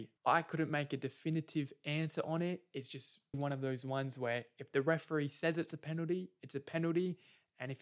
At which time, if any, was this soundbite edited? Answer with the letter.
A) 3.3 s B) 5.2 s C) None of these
A